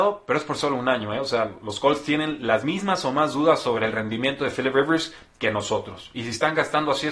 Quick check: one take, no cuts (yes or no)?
yes